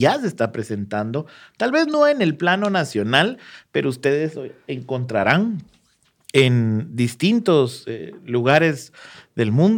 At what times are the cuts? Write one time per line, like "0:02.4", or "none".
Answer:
none